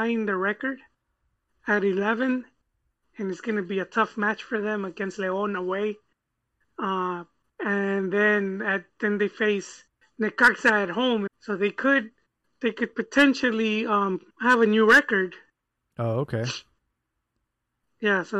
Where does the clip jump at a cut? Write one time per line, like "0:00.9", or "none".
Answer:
0:07.5
0:11.3
0:14.3